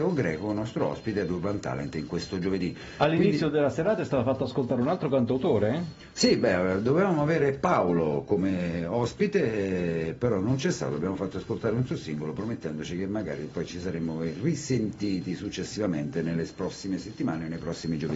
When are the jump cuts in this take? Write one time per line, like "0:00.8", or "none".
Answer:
none

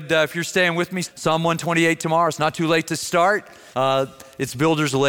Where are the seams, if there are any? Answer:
0:01.0
0:03.7

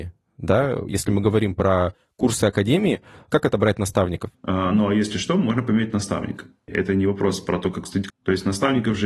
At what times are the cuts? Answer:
0:04.3
0:06.7
0:08.1

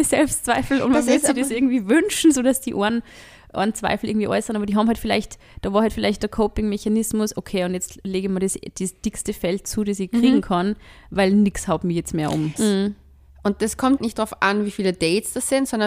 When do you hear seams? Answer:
0:12.6
0:14.0

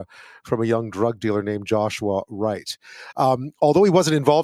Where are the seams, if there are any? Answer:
none

